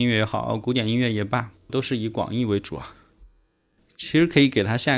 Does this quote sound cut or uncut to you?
cut